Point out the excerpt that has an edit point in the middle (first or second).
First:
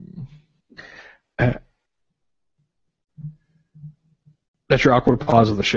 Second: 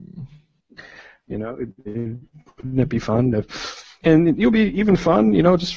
second